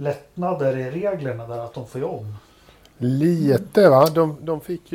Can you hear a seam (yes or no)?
no